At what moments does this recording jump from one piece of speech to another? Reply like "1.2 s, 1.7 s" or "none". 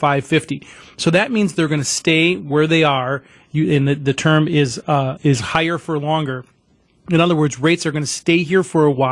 5.2 s